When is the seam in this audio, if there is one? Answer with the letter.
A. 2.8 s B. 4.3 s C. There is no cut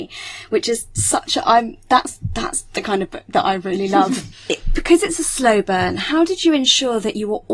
B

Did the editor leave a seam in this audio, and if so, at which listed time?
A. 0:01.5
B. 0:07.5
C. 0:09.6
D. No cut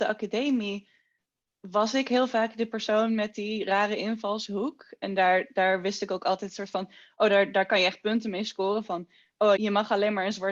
C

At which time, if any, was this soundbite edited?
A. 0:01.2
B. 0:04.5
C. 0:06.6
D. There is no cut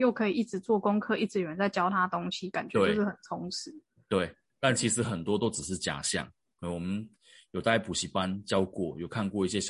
D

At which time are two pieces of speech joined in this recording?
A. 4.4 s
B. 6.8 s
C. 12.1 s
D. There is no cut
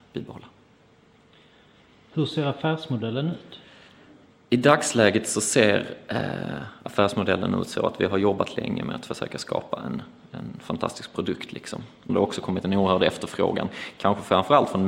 C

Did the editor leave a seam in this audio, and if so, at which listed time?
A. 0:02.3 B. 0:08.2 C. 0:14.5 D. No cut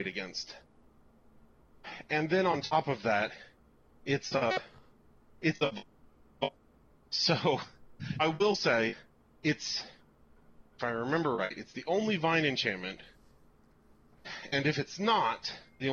B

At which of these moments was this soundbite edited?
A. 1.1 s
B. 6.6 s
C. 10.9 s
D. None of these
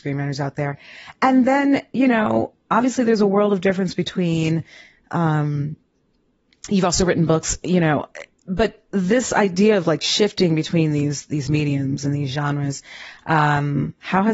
D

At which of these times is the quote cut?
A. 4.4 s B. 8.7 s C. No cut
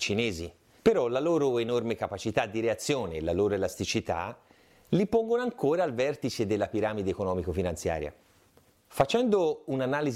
B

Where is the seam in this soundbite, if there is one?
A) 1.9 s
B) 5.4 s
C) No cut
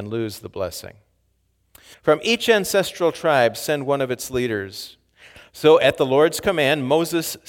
A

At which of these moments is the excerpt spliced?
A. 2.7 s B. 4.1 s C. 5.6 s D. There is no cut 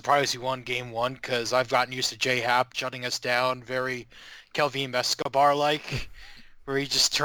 A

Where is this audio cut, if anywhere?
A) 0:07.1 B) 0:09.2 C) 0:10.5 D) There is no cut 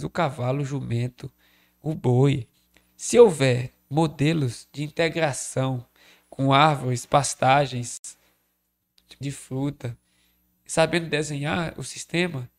B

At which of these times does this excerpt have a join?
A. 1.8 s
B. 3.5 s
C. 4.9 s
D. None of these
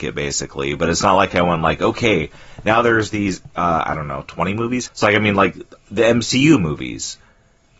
C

